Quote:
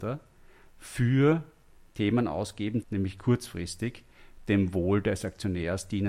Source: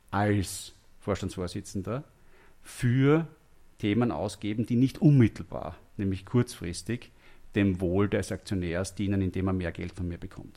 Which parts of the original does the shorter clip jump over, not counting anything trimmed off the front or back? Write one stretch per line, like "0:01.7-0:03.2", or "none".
0:04.7-0:05.9